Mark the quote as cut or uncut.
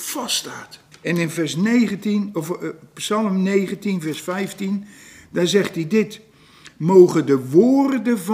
cut